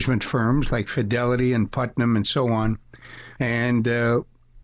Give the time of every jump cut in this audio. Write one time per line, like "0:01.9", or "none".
0:03.4